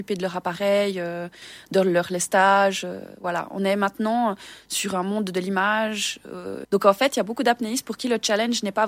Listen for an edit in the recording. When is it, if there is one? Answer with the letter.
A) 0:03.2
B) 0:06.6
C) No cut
B